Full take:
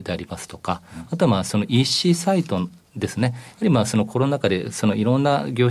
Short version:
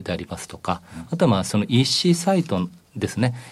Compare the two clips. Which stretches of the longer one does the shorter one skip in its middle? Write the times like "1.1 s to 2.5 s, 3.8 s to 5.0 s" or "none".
none